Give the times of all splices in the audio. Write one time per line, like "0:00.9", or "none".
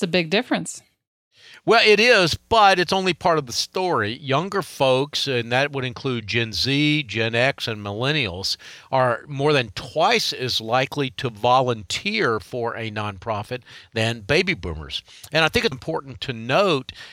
0:15.7

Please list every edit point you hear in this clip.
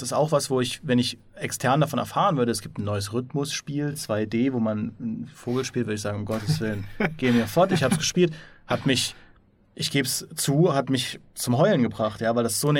none

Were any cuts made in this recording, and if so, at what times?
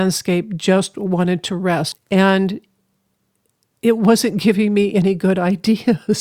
0:01.9

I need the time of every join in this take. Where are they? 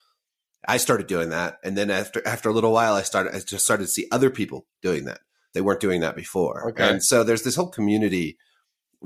0:05.5

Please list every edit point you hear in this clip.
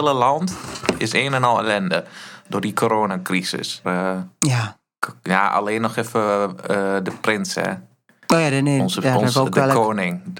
0:03.8

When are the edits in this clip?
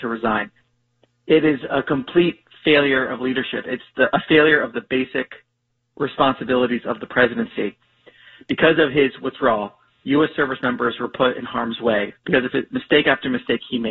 none

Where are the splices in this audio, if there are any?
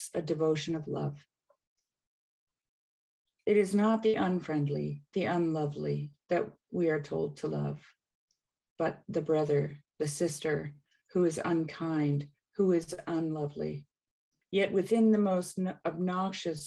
0:14.4

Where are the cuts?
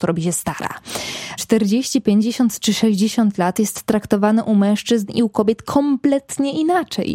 0:01.4

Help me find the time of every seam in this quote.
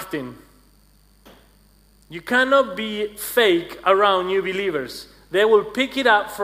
none

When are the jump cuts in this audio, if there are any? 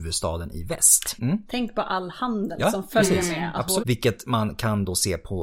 0:01.2
0:03.8

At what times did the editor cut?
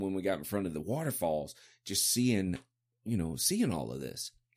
none

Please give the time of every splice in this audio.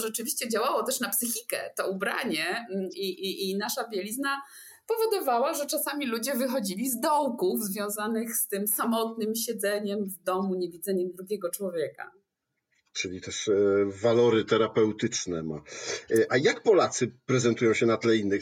none

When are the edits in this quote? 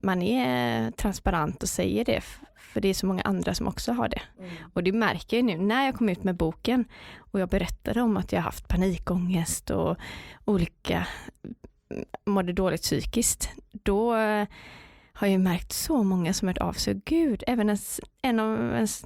none

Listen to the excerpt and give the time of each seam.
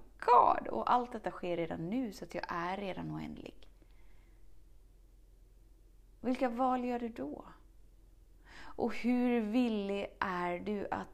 none

